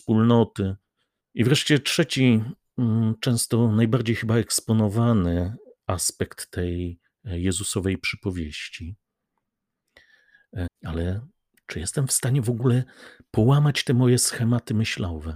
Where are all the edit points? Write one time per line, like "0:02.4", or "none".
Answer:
0:01.2
0:10.7